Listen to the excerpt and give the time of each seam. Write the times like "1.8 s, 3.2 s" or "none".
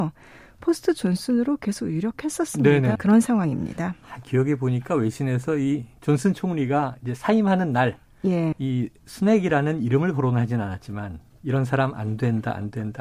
3.0 s, 8.5 s

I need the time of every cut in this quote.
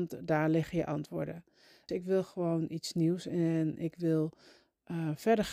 1.9 s

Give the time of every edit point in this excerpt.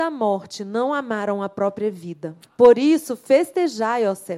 2.4 s

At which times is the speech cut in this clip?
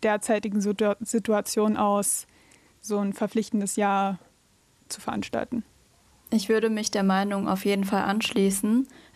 2.7 s

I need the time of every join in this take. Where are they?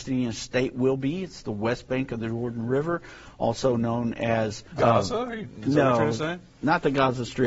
4.7 s

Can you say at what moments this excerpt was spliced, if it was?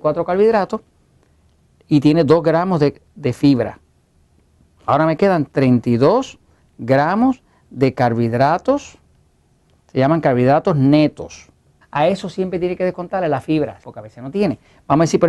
4.8 s, 11.8 s, 13.8 s

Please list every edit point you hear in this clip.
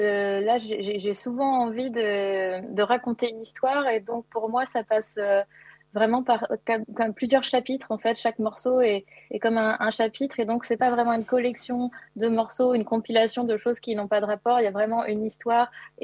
none

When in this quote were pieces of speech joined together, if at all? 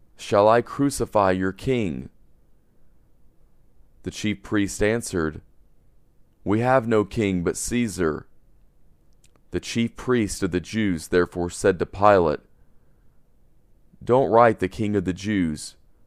9.3 s

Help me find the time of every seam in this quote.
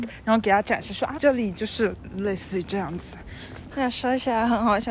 1.2 s, 3.7 s

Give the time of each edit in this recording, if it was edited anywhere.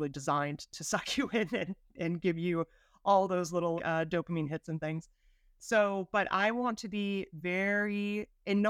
3.8 s

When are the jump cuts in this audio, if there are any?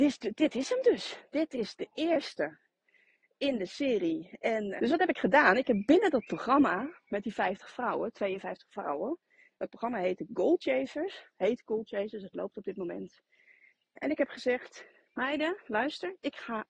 4.8 s

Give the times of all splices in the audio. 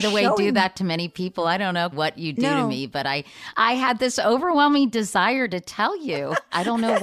1.9 s

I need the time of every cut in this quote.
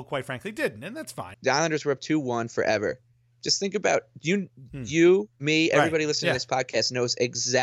1.3 s

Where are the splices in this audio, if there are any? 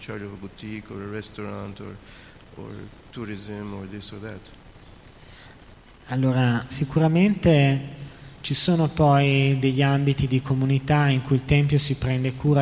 6.7 s

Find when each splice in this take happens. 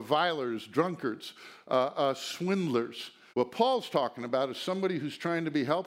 3.3 s

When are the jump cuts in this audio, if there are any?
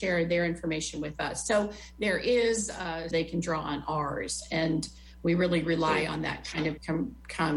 3.1 s

